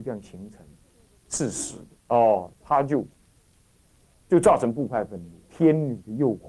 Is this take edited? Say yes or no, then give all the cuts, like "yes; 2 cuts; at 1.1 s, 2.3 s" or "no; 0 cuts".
yes; 2 cuts; at 2.0 s, 5.4 s